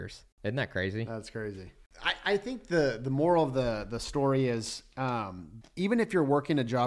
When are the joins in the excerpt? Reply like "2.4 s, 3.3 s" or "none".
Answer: 5.6 s